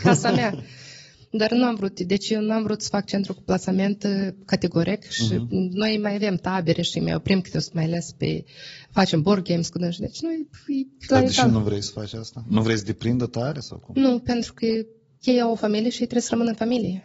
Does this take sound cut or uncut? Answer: uncut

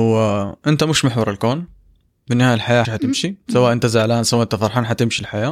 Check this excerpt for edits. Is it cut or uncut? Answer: cut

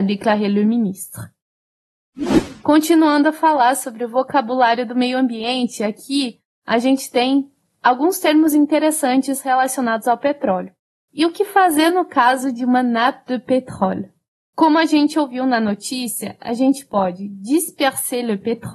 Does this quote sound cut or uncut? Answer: cut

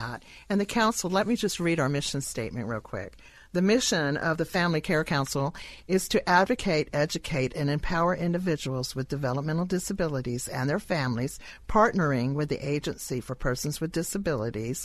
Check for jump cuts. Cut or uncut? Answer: uncut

